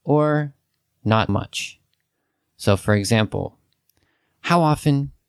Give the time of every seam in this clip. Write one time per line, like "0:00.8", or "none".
0:01.3